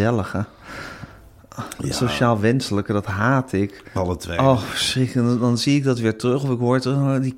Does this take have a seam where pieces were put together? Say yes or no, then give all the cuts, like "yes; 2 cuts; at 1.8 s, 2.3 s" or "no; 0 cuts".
yes; 1 cut; at 4.0 s